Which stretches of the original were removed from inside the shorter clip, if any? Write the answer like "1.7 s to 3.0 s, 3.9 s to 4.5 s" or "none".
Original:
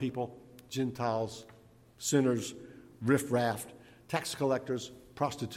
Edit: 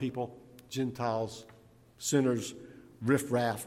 none